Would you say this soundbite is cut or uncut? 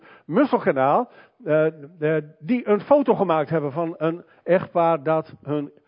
uncut